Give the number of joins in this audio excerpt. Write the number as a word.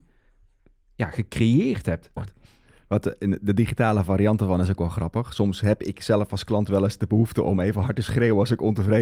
one